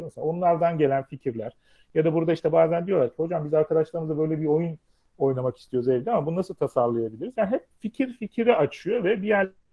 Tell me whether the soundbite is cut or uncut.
uncut